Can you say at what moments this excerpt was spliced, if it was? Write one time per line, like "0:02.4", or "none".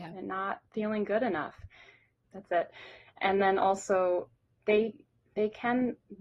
0:02.2
0:04.5